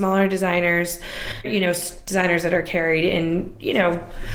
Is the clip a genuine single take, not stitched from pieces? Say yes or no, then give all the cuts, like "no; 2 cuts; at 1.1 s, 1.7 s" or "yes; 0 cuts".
no; 1 cut; at 1.4 s